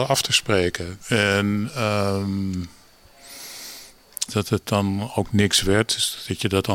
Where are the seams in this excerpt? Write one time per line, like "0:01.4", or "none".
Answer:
0:01.0
0:04.3